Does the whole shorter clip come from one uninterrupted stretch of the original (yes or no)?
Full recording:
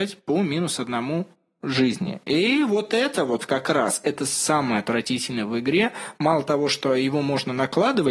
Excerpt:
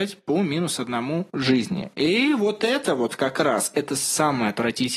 no